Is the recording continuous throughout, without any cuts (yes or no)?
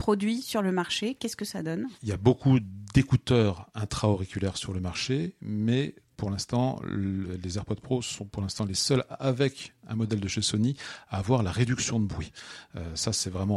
yes